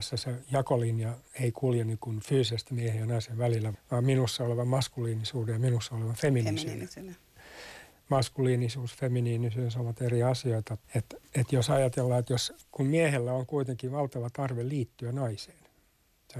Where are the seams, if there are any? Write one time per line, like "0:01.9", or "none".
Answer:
0:03.7
0:07.9
0:10.8